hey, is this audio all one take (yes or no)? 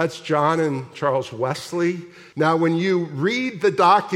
no